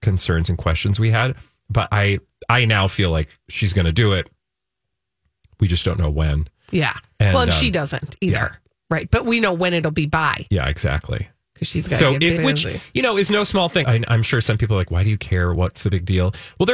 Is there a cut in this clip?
yes; 2 cuts; at 12.4 s, 13.8 s

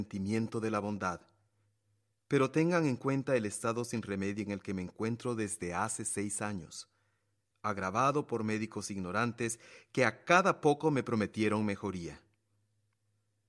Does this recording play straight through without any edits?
no; 1 cut; at 2.1 s

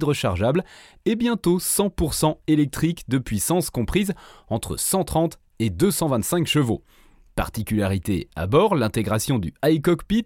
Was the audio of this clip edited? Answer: no; 0 cuts

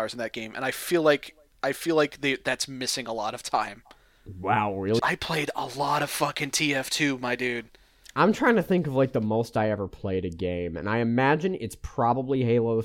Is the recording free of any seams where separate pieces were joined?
no; 1 cut; at 5.0 s

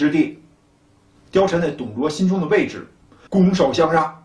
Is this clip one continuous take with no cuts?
no; 2 cuts; at 1.1 s, 3.3 s

